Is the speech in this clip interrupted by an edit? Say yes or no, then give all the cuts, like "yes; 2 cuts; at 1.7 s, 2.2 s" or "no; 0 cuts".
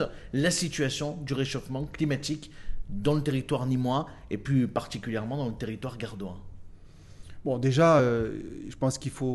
no; 0 cuts